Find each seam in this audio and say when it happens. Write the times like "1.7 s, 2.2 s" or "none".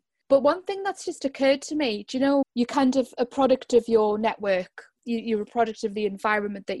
2.4 s